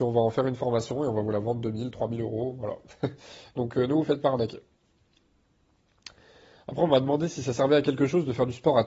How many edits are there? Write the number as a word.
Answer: zero